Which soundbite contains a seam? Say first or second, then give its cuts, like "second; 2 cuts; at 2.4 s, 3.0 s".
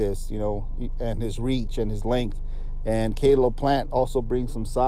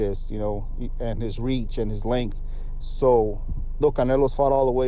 second; 2 cuts; at 2.8 s, 3.8 s